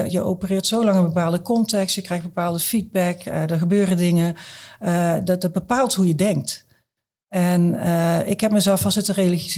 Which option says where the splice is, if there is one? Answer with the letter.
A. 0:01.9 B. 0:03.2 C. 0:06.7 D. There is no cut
D